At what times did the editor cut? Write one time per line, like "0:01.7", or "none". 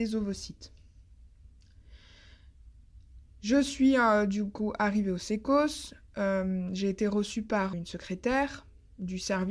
0:07.7

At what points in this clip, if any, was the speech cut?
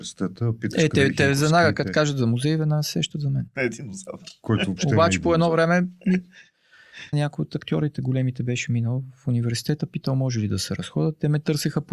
0:03.5
0:07.1

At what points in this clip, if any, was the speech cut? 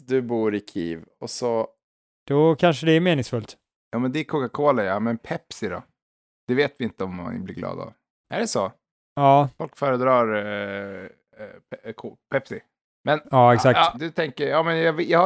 0:02.2
0:08.2
0:13.9

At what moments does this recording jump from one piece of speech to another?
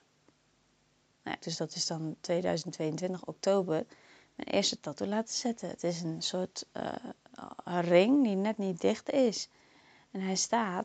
0:01.4

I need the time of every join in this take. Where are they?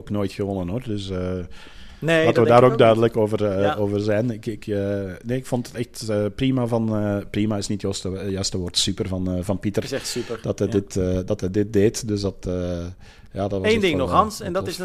none

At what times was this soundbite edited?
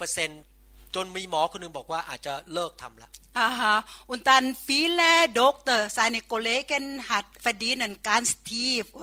0:07.4

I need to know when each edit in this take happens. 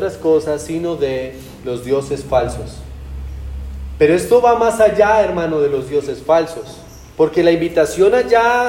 0:07.1

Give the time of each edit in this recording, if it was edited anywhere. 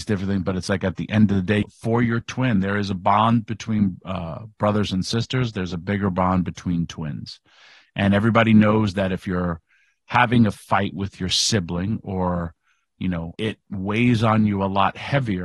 0:01.6
0:13.4

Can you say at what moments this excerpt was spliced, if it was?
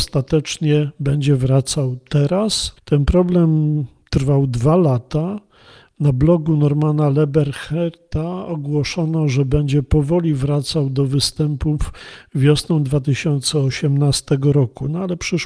0:02.8

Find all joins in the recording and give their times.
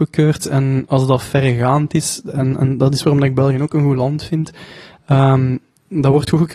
none

